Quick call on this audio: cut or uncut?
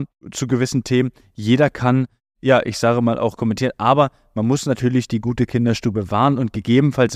uncut